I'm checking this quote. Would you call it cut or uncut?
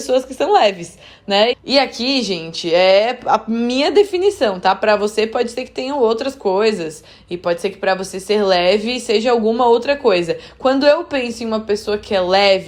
cut